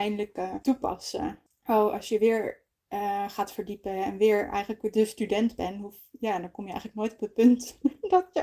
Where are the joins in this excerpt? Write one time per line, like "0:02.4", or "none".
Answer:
none